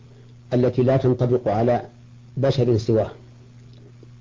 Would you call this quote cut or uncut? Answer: uncut